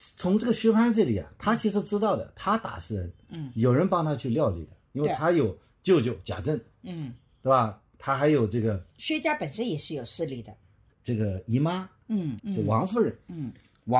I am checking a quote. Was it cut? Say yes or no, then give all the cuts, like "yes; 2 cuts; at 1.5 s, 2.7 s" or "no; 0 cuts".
yes; 2 cuts; at 10.9 s, 12.4 s